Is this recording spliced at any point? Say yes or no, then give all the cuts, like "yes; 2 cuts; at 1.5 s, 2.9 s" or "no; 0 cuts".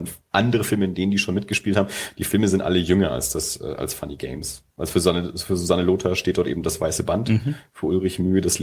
yes; 1 cut; at 4.7 s